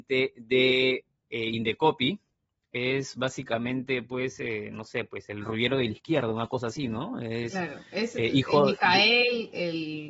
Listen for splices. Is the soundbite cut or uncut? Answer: uncut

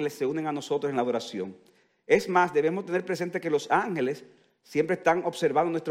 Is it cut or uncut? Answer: uncut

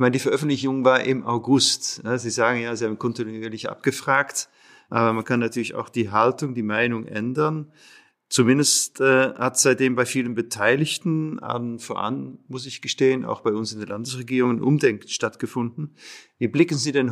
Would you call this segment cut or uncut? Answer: uncut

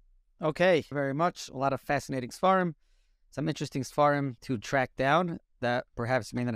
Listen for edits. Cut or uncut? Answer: cut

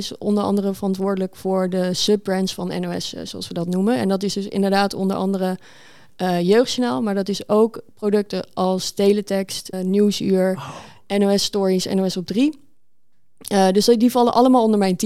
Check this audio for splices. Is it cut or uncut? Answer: cut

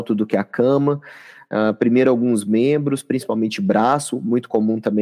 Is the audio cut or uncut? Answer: uncut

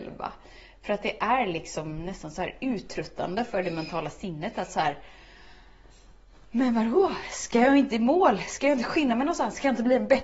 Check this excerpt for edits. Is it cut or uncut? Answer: uncut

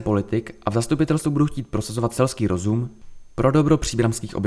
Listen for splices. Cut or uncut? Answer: uncut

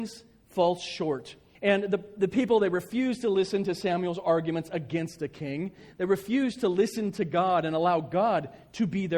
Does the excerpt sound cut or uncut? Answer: cut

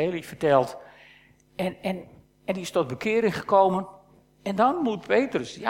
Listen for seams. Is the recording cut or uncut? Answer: uncut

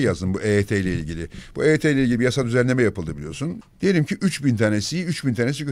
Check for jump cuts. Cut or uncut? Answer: cut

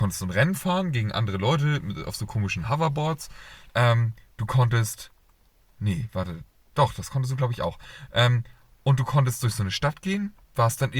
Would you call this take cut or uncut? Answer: uncut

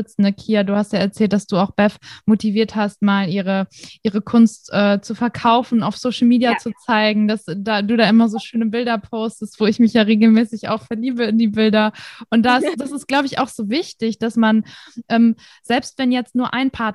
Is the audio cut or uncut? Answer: uncut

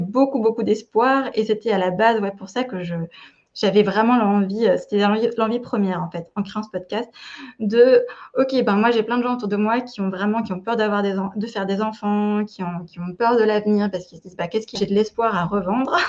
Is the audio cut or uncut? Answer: cut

